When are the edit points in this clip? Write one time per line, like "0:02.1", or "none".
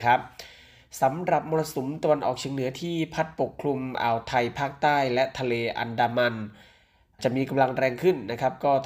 none